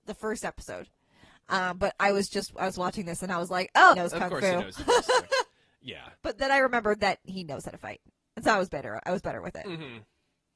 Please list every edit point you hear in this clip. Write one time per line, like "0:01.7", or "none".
0:03.9
0:06.2
0:07.2